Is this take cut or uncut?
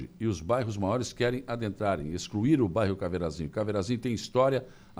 uncut